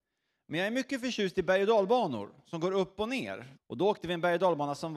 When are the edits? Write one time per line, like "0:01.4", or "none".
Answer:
0:03.5